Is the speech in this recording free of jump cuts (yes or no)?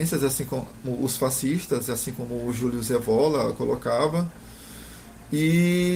yes